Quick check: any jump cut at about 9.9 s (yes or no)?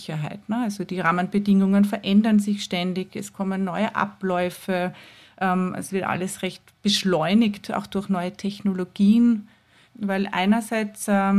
yes